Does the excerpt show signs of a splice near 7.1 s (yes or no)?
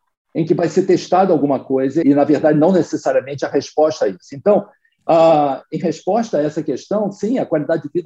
no